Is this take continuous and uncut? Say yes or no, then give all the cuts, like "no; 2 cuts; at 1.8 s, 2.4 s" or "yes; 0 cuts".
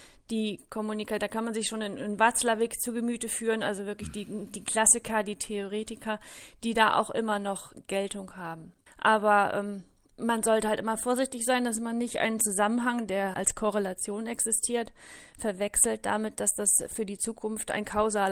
no; 2 cuts; at 8.9 s, 13.3 s